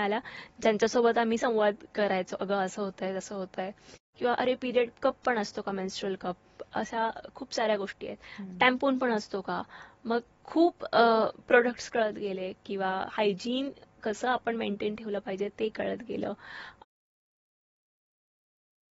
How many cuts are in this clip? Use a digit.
1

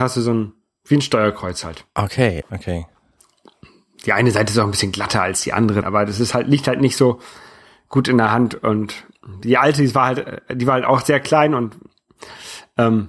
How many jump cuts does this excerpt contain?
2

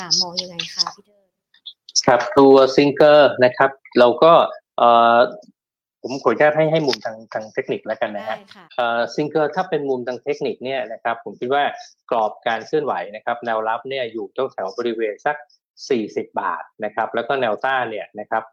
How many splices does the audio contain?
1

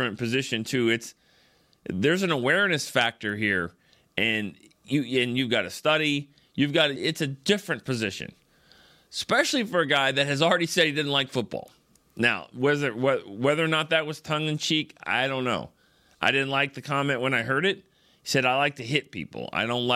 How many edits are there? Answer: 1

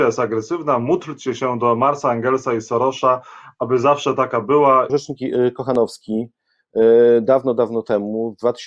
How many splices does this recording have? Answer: 1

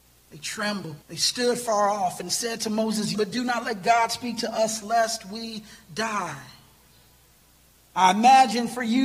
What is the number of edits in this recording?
3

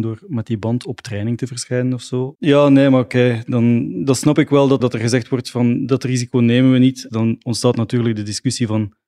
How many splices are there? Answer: 3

